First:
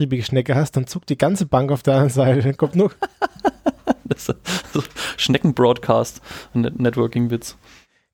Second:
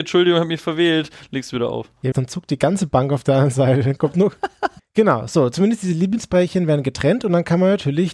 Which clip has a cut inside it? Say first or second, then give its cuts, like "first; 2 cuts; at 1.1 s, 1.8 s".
second; 2 cuts; at 2.1 s, 4.8 s